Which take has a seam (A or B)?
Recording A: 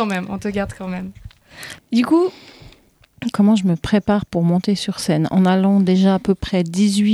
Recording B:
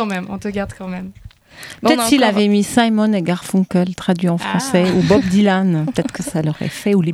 A